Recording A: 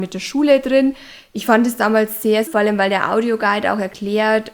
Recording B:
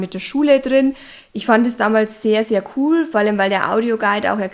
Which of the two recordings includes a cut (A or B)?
A